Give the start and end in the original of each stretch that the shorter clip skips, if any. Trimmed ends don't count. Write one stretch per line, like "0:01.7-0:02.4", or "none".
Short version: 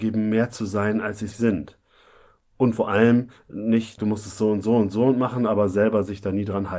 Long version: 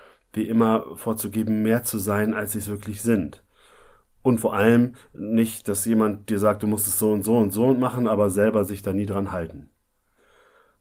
0:02.6-0:03.0
0:05.6-0:06.6